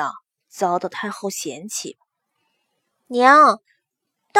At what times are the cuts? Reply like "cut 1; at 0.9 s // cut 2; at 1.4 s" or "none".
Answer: none